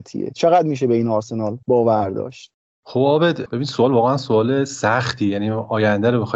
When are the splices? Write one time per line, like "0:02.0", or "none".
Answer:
0:01.6